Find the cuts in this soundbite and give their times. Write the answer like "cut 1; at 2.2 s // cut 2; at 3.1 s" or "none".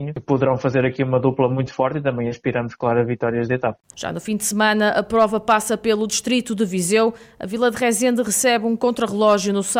cut 1; at 3.9 s